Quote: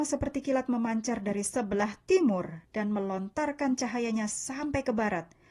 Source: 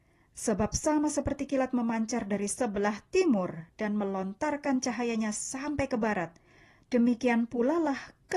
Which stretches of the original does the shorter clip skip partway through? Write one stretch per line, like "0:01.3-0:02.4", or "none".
none